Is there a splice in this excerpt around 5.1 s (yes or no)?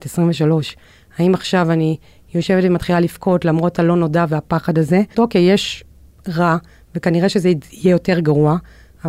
yes